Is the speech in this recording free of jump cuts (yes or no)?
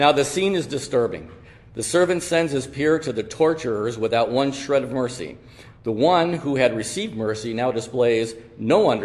yes